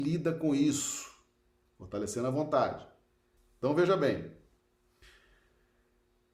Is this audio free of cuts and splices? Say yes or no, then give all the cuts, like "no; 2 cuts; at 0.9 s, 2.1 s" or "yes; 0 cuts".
no; 2 cuts; at 1.7 s, 3.4 s